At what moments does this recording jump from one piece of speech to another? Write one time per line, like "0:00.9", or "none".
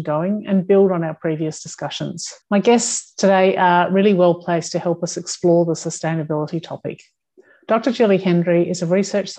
0:02.4